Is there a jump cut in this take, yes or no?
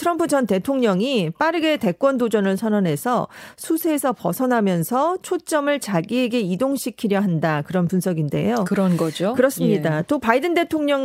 no